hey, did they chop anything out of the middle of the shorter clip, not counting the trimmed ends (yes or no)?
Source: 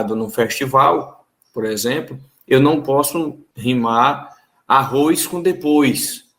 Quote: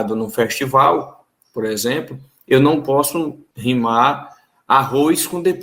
no